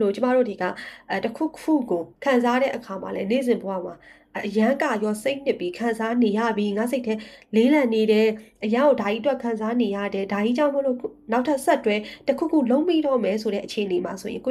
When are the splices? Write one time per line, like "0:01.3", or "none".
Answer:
0:02.1